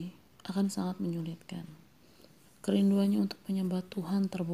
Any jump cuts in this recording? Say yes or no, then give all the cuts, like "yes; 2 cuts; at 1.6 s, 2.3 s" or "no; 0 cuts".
yes; 1 cut; at 2.4 s